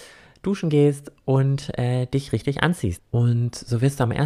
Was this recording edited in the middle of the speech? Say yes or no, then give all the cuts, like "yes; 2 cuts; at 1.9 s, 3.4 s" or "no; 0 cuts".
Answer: yes; 1 cut; at 3.0 s